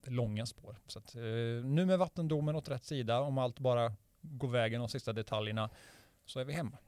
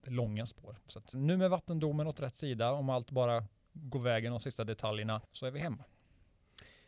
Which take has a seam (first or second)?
second